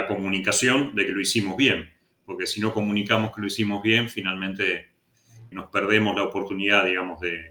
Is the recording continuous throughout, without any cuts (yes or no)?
no